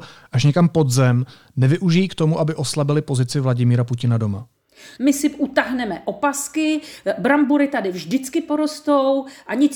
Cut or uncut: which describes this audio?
cut